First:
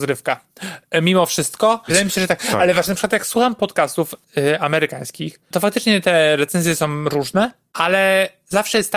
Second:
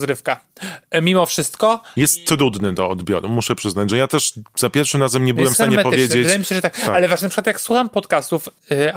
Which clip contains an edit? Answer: first; 1 cut; at 1.9 s

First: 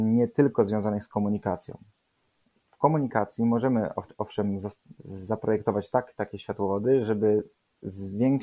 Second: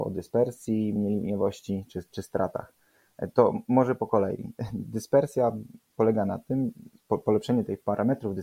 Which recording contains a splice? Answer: second; 1 cut; at 1.0 s

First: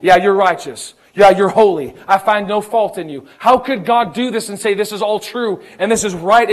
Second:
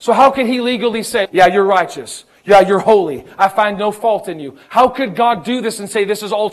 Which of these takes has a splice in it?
second; 1 cut; at 1.3 s

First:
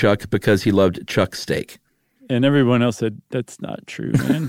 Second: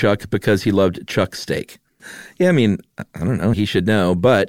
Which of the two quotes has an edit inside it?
second; 2 cuts; at 2.0 s, 3.5 s

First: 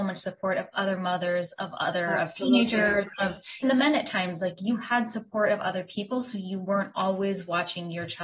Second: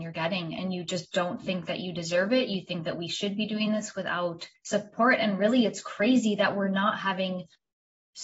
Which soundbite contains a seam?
first; 1 cut; at 3.6 s

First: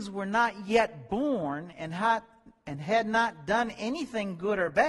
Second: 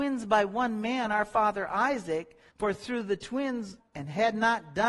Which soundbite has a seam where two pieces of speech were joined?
second; 2 cuts; at 2.5 s, 3.8 s

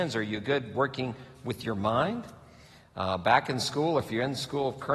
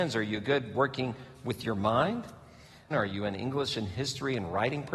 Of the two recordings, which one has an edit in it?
second; 1 cut; at 2.9 s

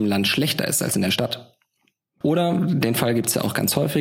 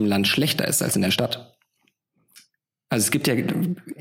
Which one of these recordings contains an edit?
first; 1 cut; at 2.2 s

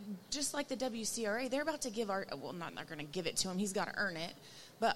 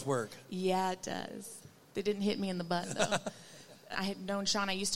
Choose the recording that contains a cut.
second; 1 cut; at 3.9 s

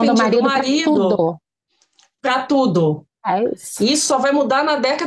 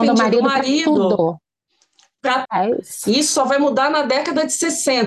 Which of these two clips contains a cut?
second; 1 cut; at 2.5 s

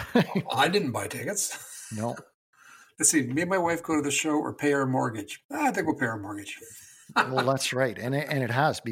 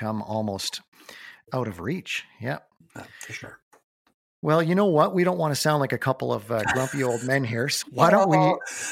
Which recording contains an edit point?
second; 1 cut; at 7.8 s

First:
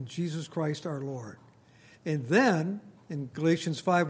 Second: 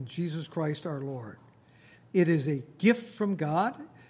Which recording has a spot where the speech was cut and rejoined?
first; 1 cut; at 2.0 s

